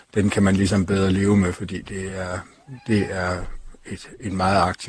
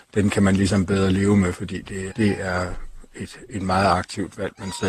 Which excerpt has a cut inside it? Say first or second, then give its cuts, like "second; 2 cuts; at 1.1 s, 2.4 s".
second; 1 cut; at 2.1 s